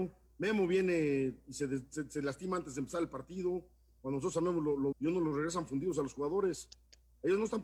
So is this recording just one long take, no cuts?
no; 1 cut; at 4.9 s

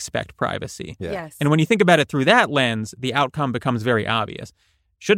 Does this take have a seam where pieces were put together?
no; 0 cuts

